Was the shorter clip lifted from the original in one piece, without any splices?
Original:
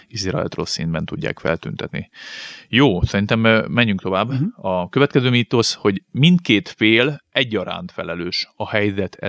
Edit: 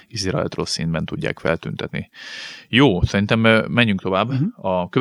yes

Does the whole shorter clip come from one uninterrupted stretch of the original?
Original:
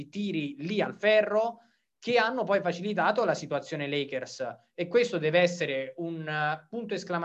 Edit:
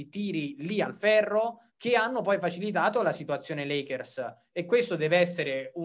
no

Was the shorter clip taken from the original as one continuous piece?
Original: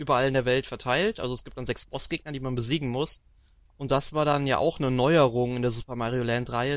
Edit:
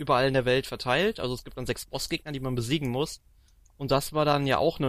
yes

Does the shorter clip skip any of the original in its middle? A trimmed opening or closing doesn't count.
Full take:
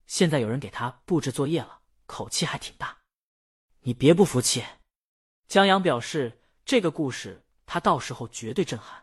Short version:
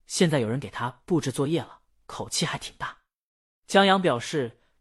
yes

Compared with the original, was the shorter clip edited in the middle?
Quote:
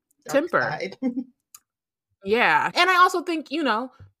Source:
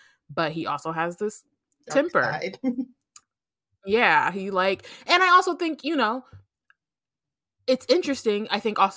yes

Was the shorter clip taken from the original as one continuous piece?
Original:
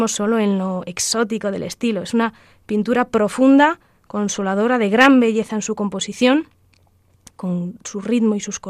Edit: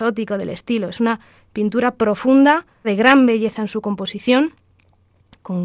no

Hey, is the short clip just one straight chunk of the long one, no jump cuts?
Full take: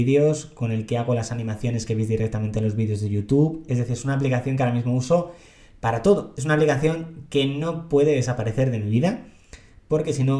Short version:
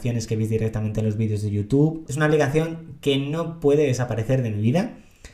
no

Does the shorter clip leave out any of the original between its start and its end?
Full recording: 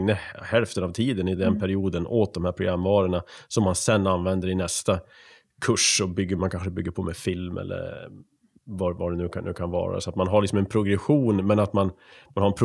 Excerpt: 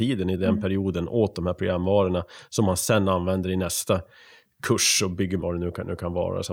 yes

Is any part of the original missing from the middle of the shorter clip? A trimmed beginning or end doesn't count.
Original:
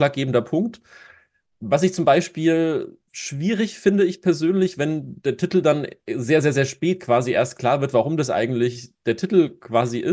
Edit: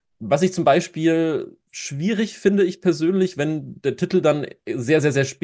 no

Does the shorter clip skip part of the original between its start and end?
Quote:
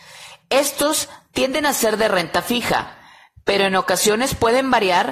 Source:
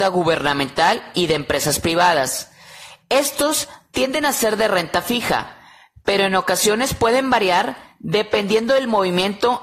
no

